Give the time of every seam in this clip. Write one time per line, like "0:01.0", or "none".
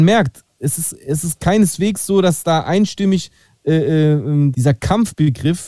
0:04.5